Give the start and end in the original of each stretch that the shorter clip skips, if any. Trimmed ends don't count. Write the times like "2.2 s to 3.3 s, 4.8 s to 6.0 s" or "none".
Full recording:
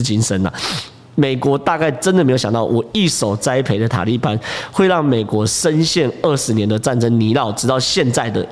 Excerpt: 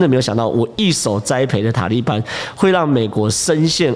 none